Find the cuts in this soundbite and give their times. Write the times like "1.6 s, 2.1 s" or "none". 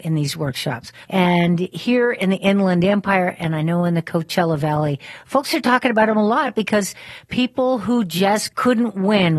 1.1 s